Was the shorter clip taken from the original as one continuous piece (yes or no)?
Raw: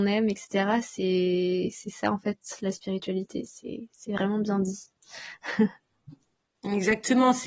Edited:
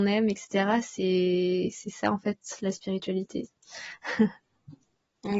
no